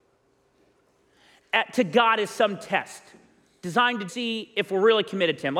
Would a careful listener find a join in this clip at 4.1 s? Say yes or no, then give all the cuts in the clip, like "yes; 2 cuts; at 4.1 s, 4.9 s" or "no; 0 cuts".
yes; 1 cut; at 4.1 s